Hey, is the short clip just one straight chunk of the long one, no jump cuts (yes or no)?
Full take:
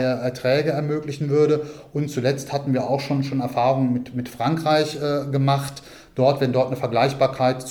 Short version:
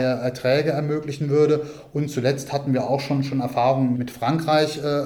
no